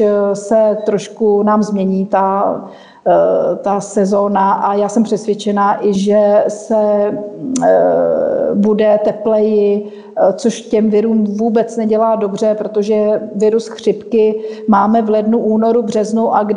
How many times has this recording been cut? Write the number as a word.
one